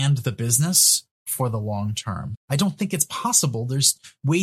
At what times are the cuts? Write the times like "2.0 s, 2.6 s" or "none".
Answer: 2.3 s